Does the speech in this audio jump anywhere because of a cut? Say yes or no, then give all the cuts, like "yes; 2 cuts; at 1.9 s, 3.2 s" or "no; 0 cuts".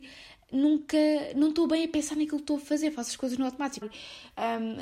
yes; 1 cut; at 3.8 s